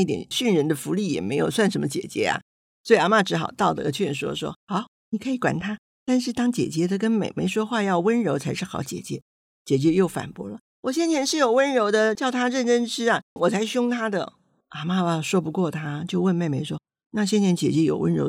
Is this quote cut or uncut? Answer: cut